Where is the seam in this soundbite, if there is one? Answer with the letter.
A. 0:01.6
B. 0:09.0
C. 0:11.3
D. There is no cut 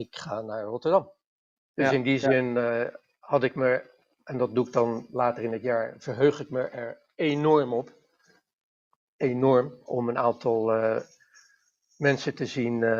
A